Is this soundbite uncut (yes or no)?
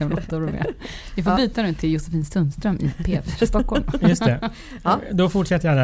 yes